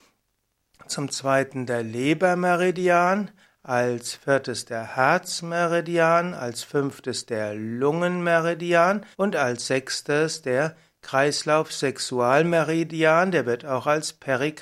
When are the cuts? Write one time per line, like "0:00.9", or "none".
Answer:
0:03.4
0:09.1